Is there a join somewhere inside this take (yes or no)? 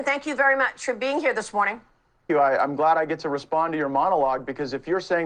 yes